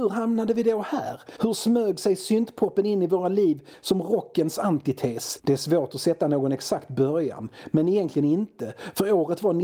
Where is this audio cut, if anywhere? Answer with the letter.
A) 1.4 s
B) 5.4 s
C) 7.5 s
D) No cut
A